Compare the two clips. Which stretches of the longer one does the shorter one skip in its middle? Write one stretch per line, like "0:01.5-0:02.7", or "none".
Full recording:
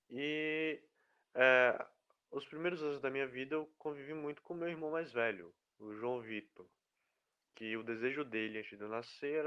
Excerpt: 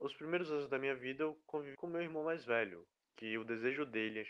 0:04.1-0:04.4
0:05.7-0:07.4